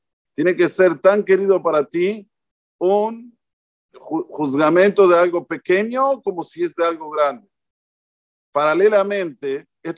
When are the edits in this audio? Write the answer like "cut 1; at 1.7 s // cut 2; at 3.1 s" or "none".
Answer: cut 1; at 3.9 s